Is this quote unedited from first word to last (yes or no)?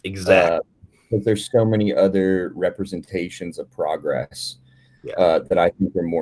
yes